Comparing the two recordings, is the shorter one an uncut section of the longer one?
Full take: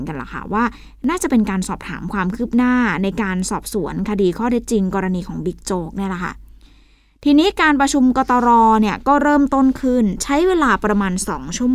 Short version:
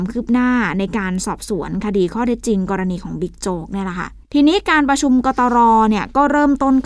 no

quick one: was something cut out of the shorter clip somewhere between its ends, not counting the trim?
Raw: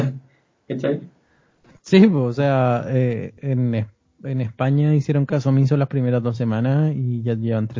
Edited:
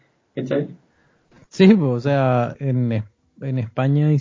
yes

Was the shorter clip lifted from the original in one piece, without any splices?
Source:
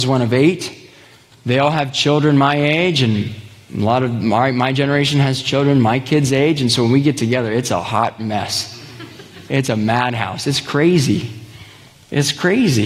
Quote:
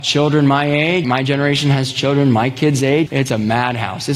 no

